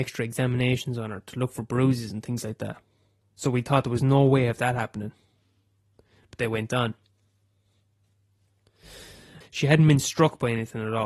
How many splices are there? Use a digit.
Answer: 2